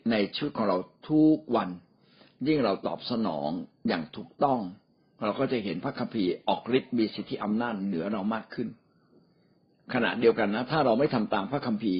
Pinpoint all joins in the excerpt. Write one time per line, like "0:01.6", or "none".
none

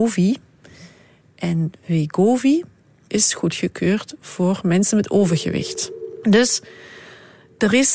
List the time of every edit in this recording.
0:03.1
0:06.2

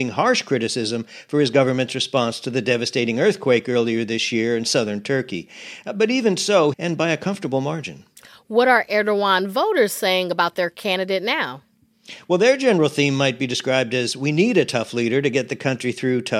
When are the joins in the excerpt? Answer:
0:06.7

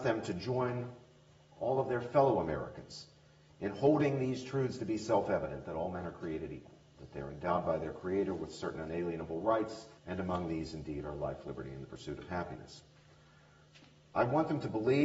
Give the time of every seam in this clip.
0:10.0

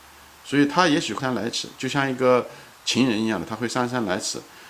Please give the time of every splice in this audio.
0:01.2

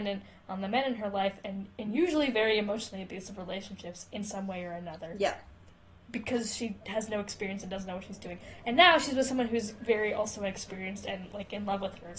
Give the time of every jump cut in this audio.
none

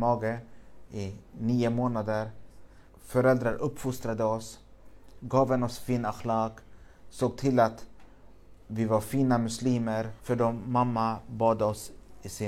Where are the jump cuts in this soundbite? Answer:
0:02.9
0:10.2

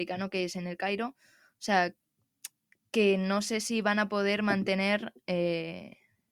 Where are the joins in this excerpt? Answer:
none

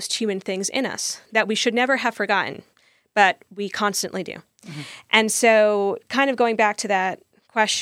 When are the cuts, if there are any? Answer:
none

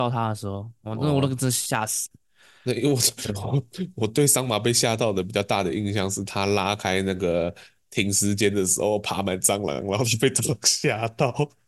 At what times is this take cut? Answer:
none

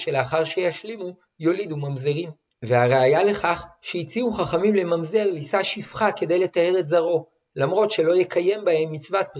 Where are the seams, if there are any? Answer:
0:02.6

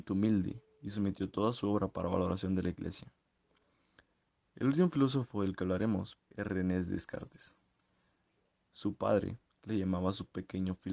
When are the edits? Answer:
0:06.2

